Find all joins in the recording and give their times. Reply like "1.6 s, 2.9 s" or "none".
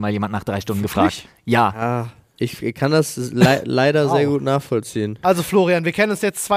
5.2 s